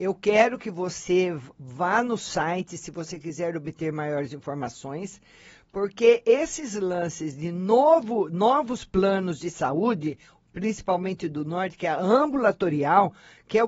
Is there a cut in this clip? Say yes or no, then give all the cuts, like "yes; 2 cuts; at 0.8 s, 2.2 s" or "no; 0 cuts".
no; 0 cuts